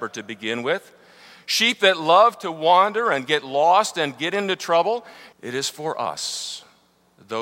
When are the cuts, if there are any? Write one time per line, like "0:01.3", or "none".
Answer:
0:05.3